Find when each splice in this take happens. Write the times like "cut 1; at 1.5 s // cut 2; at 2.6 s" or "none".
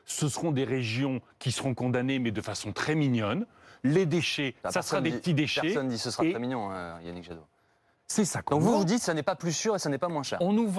cut 1; at 7.9 s